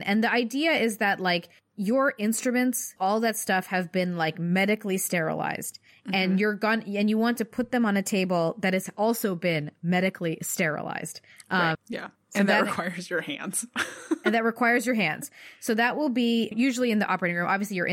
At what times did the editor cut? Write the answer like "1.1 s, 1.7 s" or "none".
3.0 s, 11.7 s, 16.5 s